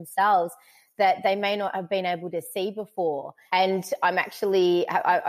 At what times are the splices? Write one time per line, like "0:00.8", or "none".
0:03.5